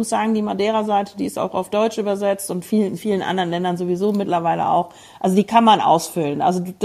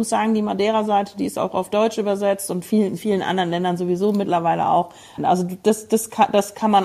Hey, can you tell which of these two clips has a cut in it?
second; 1 cut; at 5.2 s

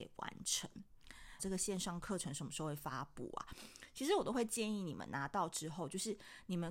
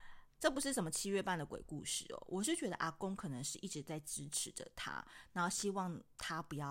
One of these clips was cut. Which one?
first; 1 cut; at 1.4 s

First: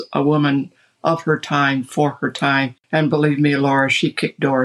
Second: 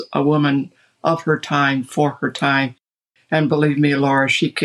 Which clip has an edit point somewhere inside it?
first; 1 cut; at 2.8 s

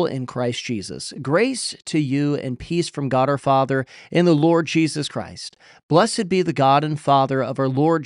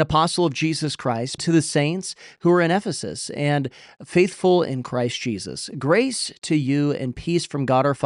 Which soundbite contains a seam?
second; 1 cut; at 1.4 s

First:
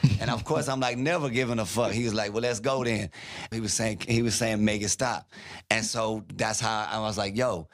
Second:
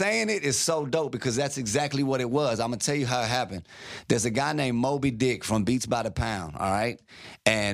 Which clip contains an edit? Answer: first; 1 cut; at 3.5 s

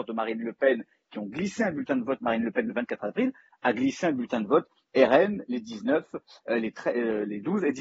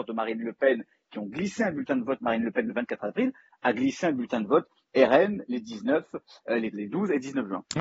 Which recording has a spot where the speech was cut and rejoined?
second; 1 cut; at 6.7 s

